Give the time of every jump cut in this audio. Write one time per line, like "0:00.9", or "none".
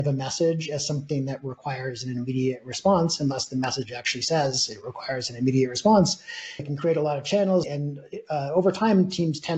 0:06.6
0:07.6